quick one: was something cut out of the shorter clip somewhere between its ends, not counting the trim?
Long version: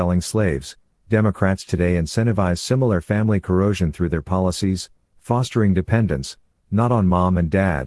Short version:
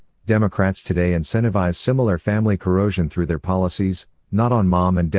yes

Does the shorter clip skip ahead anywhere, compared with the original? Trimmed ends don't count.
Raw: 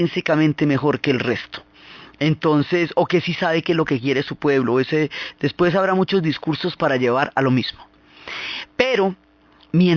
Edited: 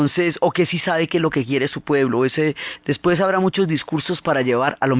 no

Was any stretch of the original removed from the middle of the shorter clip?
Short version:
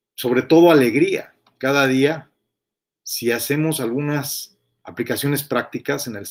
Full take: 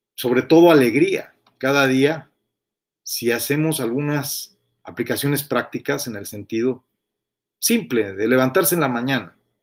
no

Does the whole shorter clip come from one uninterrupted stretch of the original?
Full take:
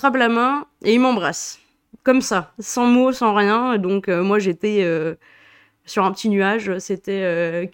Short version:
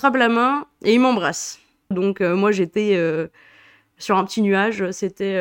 no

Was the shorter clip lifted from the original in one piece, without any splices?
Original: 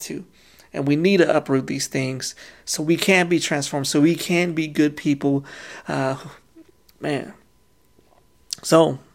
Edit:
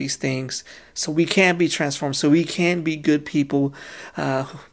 yes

